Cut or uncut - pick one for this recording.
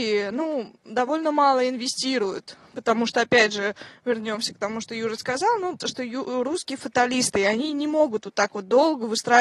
cut